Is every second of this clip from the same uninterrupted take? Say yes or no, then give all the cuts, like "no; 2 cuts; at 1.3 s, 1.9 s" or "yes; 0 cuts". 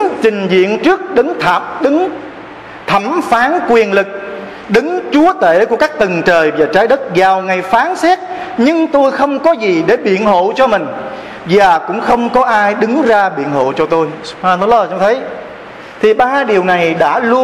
yes; 0 cuts